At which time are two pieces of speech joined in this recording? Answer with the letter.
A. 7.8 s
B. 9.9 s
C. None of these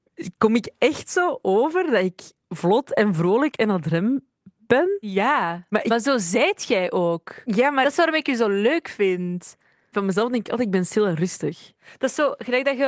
B